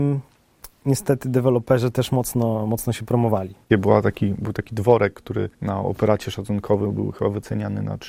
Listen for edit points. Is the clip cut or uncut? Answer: cut